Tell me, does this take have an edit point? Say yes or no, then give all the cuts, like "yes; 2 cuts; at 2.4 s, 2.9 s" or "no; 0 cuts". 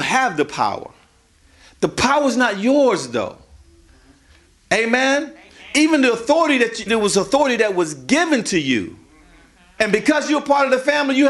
yes; 2 cuts; at 6.9 s, 9.8 s